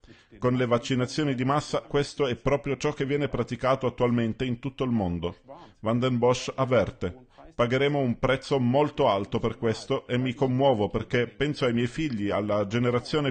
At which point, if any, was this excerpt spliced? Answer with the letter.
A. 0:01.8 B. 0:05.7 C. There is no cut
A